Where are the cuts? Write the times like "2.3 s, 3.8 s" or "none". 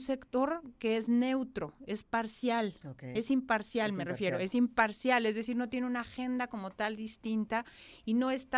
none